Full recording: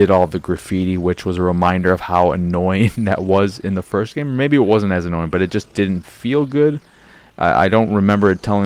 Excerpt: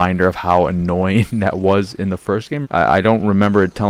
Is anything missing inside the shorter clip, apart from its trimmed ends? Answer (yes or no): yes